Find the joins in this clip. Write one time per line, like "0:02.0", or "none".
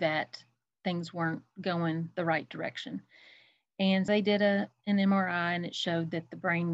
0:04.1